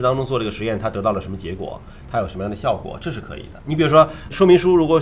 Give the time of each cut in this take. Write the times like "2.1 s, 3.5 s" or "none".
none